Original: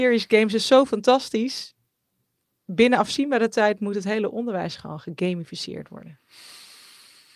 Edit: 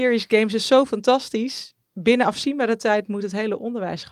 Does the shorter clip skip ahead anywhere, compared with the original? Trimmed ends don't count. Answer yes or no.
yes